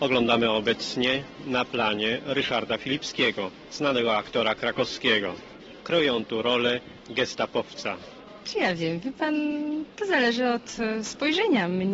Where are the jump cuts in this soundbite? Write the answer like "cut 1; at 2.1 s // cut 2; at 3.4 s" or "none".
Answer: cut 1; at 8.4 s